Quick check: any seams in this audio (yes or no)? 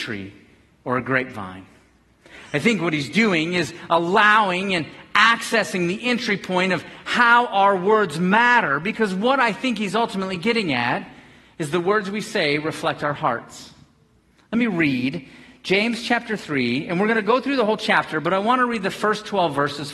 no